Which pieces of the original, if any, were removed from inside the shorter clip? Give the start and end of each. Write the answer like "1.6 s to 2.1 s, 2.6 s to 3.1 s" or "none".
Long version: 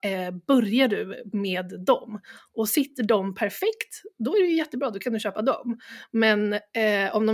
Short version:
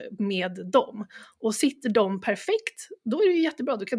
none